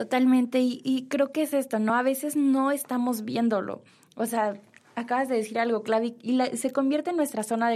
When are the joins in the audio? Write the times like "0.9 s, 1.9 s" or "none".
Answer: none